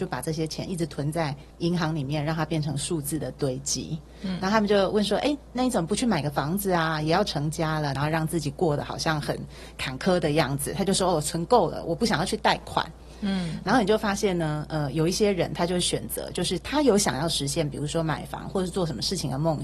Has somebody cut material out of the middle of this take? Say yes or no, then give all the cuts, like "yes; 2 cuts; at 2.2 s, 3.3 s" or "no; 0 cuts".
yes; 2 cuts; at 1.5 s, 7.9 s